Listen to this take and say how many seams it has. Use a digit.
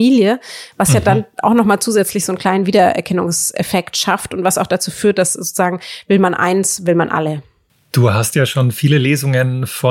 0